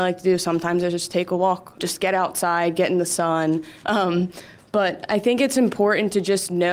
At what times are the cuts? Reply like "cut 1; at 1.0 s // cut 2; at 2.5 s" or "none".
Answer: cut 1; at 1.8 s // cut 2; at 3.8 s